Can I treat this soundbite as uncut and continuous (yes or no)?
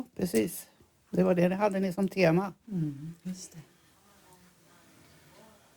no